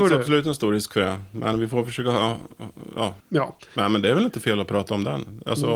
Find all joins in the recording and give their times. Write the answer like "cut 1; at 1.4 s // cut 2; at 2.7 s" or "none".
cut 1; at 3.2 s